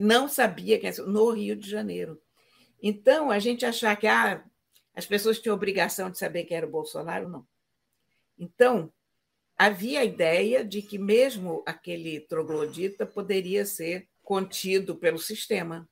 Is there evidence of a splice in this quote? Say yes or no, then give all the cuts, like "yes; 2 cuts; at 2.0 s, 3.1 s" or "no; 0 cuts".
yes; 3 cuts; at 7.2 s, 9.6 s, 14.2 s